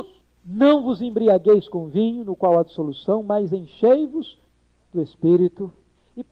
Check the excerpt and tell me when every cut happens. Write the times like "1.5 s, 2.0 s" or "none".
none